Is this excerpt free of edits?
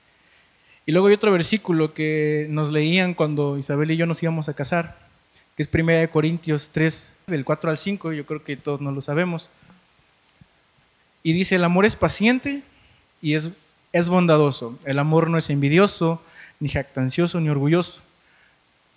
no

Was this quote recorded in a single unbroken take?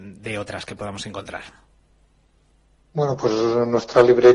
yes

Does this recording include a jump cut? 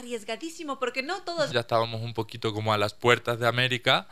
yes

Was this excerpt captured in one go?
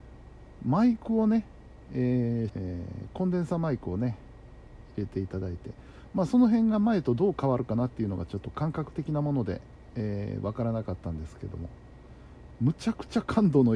no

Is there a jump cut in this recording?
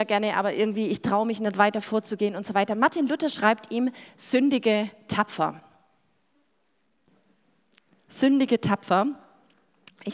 no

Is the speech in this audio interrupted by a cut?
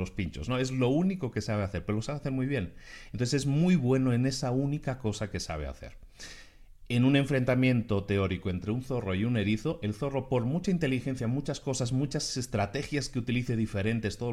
no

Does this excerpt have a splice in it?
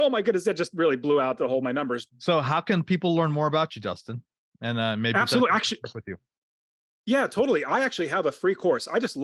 yes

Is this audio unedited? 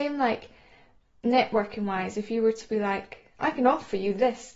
yes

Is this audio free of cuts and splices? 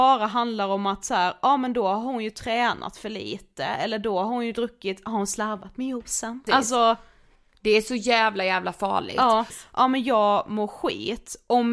no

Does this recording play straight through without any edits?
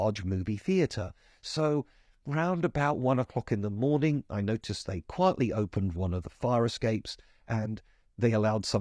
yes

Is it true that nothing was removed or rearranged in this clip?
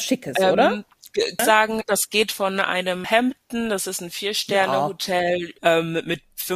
no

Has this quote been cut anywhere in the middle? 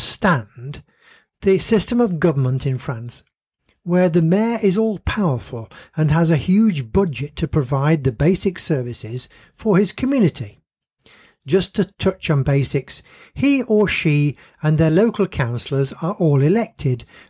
no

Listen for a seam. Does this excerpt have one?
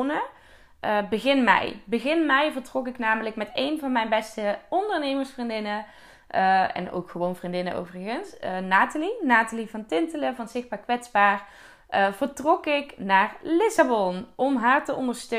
no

